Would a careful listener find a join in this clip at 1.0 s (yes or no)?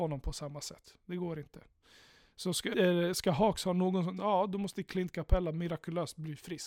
no